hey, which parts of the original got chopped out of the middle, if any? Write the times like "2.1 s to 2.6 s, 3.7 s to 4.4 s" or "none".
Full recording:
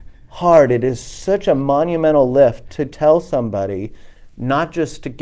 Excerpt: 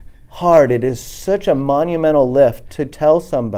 none